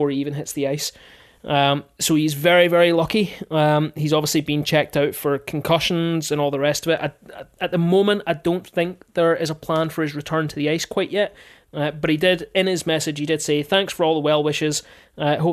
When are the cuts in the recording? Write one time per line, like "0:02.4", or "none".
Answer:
none